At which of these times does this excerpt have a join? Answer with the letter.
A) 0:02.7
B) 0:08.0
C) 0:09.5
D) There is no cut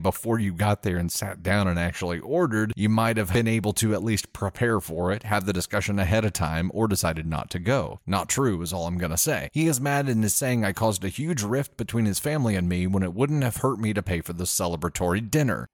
B